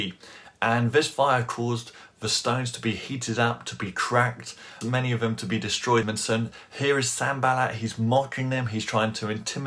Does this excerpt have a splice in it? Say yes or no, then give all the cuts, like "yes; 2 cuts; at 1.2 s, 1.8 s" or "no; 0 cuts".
yes; 2 cuts; at 4.8 s, 6.0 s